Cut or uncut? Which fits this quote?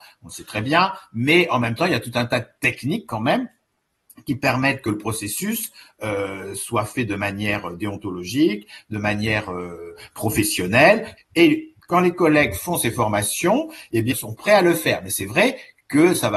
cut